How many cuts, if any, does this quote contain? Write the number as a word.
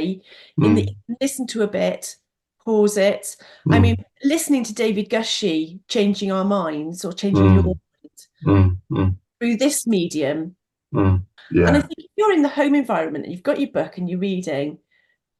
one